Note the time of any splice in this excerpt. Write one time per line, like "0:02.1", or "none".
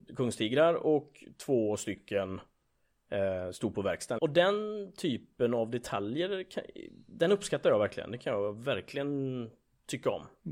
0:04.2